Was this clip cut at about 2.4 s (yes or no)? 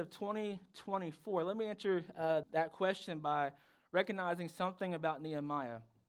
yes